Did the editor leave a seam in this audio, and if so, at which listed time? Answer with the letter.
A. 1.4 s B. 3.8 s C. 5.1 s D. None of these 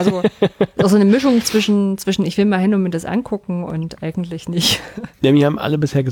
C